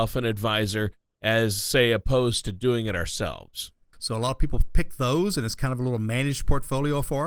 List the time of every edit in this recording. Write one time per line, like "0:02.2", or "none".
0:03.9